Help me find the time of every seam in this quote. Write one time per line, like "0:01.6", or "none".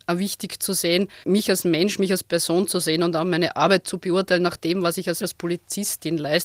0:01.2
0:05.2